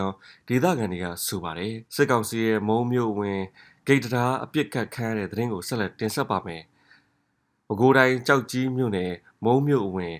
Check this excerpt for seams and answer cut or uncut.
cut